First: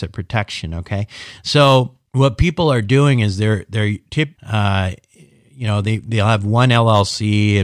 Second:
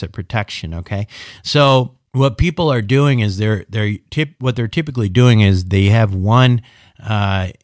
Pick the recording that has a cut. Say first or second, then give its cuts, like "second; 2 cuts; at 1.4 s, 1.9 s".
first; 1 cut; at 4.4 s